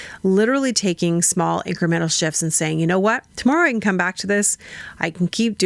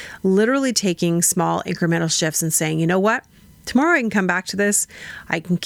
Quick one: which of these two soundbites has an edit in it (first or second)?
first